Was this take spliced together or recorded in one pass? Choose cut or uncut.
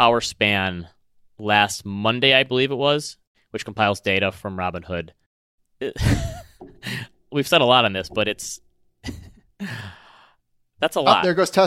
cut